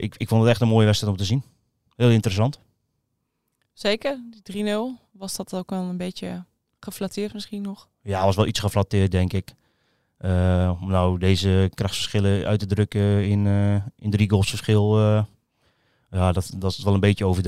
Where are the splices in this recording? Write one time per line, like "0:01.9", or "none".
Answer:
none